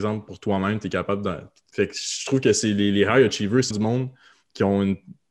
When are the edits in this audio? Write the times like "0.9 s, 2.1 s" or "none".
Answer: 1.7 s, 3.7 s